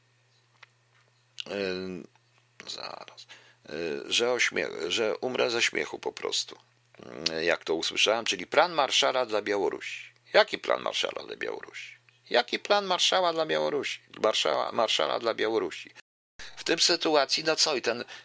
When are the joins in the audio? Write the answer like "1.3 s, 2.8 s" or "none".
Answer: none